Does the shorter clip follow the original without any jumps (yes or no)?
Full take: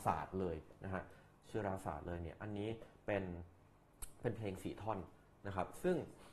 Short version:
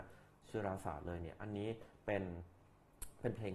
yes